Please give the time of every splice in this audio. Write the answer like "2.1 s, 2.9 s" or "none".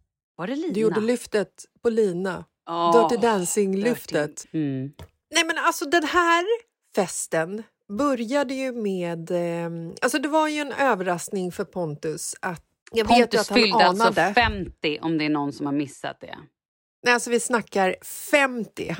4.4 s, 12.8 s